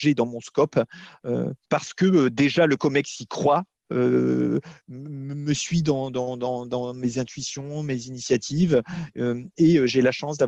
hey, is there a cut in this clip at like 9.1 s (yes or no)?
no